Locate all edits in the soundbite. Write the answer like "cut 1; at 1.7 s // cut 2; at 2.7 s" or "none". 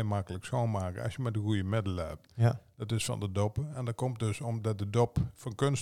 cut 1; at 2.3 s

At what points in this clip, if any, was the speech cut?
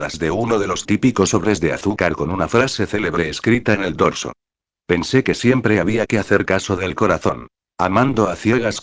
cut 1; at 7.6 s

